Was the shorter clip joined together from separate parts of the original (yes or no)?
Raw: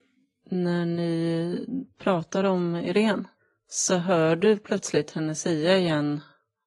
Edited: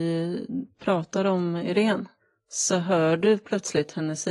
no